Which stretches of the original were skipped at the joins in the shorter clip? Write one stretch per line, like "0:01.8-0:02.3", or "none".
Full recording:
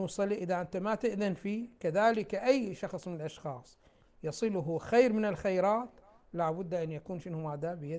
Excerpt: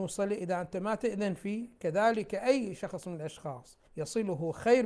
0:03.9-0:04.1